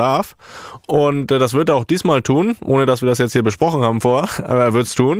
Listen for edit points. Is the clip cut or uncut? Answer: uncut